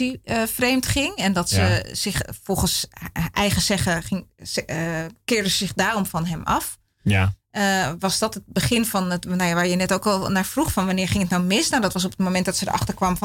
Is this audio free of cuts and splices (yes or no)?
yes